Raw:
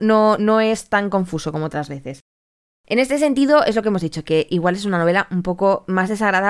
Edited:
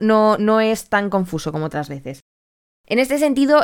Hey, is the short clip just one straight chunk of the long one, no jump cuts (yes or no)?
yes